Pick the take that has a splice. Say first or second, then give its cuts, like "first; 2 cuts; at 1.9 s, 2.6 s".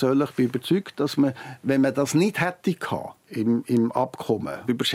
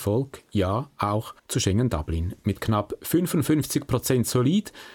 second; 1 cut; at 1.4 s